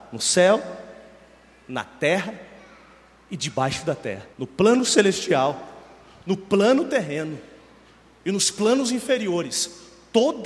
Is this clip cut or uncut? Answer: cut